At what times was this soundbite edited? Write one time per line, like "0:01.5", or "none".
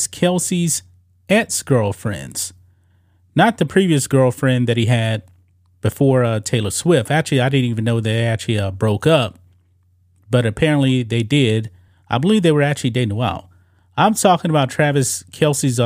none